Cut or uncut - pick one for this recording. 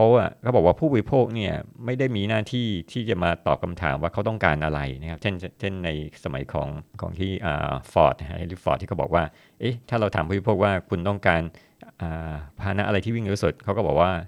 cut